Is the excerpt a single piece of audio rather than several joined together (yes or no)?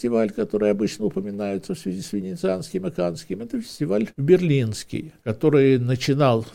yes